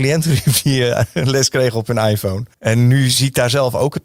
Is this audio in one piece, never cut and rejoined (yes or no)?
no